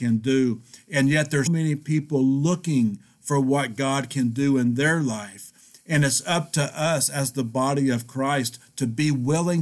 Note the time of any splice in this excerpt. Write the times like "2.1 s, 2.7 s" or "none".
1.5 s